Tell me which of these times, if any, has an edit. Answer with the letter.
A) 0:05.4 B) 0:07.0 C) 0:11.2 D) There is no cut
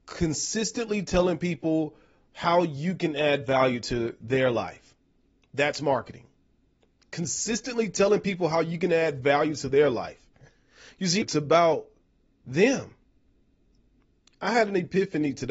C